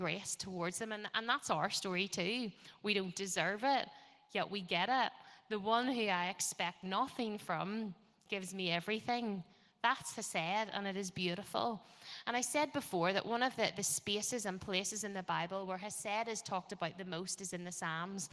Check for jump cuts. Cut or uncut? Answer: uncut